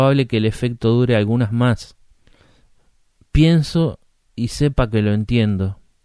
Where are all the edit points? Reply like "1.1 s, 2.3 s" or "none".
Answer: none